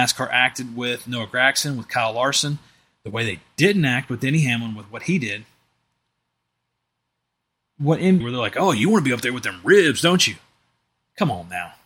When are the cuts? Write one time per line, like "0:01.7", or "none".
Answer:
0:08.2